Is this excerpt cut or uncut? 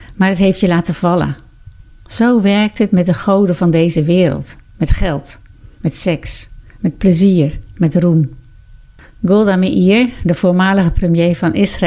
uncut